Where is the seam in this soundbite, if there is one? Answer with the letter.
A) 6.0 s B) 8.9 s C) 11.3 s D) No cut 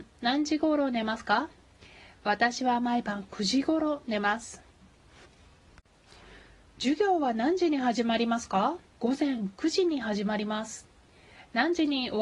B